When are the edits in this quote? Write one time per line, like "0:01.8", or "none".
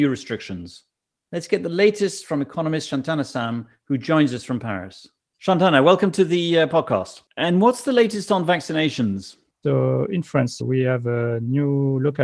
0:07.3
0:09.5
0:10.6